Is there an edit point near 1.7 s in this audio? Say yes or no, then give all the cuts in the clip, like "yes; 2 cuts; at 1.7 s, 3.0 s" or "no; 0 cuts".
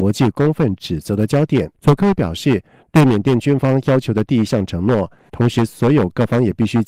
yes; 2 cuts; at 1.7 s, 5.3 s